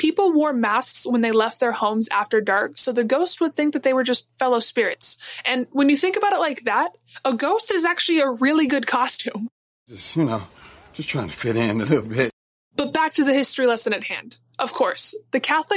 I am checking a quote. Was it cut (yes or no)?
no